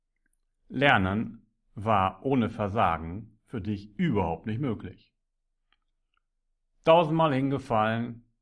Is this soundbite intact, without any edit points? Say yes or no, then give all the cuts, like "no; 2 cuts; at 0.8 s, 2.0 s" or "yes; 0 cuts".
yes; 0 cuts